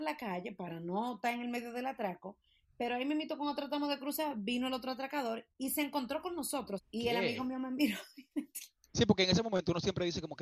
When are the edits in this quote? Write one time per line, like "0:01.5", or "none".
0:06.8